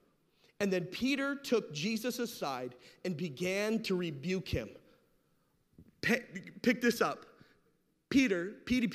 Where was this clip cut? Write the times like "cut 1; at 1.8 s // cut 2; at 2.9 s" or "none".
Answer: none